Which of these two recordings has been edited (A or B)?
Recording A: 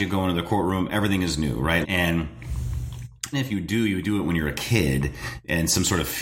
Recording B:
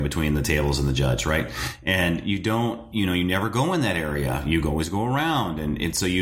A